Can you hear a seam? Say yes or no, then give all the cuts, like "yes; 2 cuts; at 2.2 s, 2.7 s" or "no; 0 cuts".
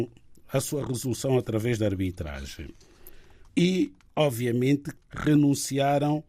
yes; 2 cuts; at 3.5 s, 5.0 s